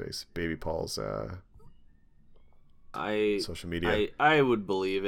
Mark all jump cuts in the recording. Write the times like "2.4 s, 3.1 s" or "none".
2.9 s